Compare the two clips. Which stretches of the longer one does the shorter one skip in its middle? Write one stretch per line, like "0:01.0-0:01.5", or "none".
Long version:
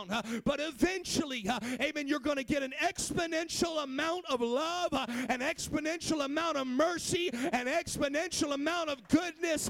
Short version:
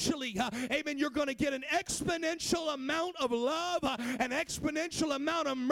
none